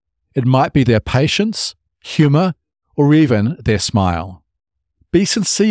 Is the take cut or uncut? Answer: cut